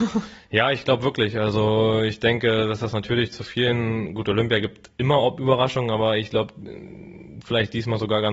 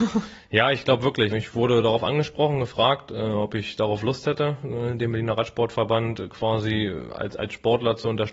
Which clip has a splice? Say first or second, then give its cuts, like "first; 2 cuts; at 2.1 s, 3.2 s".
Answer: second; 1 cut; at 1.3 s